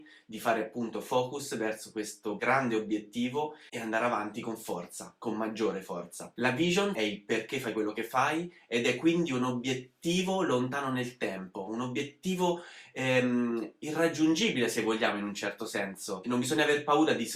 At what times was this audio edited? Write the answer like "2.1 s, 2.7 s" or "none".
6.9 s